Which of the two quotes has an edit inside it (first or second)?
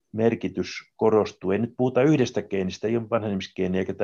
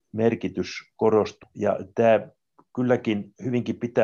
second